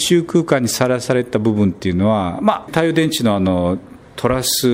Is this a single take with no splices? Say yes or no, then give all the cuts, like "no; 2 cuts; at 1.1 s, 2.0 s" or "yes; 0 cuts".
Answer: no; 1 cut; at 2.7 s